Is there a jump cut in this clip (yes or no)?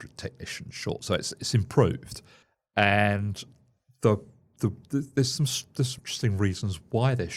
yes